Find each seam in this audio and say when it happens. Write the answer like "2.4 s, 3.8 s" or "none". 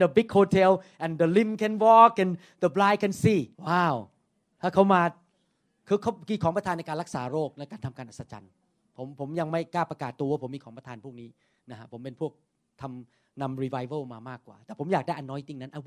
3.5 s